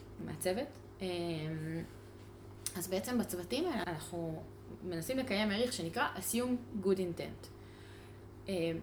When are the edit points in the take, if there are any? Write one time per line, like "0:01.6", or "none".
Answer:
0:03.8